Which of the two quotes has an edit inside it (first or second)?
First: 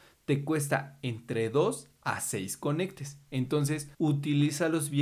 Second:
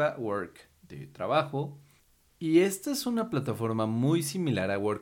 first